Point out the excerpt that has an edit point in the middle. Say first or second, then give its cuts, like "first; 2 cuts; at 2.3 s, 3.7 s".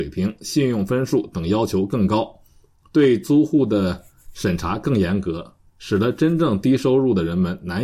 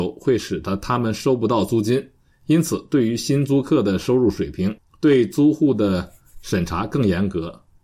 second; 1 cut; at 4.8 s